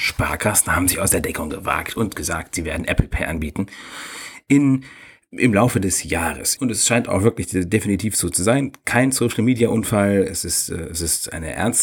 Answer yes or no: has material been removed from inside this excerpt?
yes